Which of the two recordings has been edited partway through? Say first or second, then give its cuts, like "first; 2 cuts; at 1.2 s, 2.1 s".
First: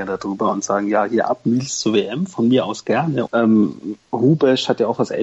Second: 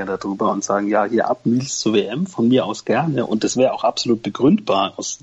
first; 1 cut; at 3.3 s